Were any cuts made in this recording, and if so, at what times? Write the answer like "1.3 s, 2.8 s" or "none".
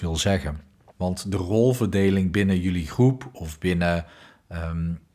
0.9 s